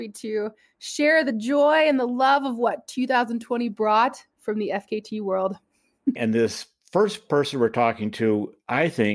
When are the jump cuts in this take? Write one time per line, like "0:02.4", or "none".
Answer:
0:06.2